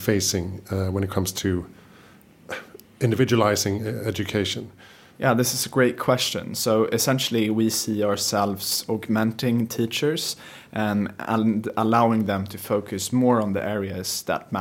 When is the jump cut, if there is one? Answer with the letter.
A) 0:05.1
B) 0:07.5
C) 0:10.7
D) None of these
A